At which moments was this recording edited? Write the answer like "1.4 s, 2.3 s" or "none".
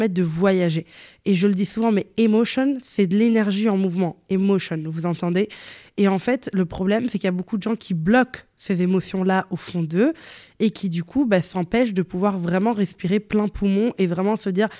none